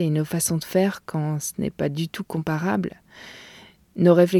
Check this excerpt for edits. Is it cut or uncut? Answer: uncut